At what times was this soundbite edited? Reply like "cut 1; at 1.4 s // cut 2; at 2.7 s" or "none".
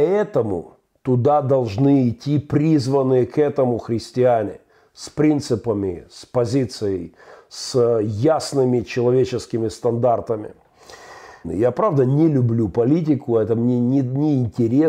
cut 1; at 11.4 s